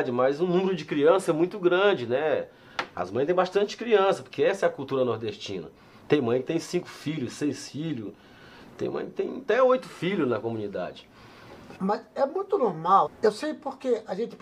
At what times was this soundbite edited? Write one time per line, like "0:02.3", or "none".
0:11.8
0:13.1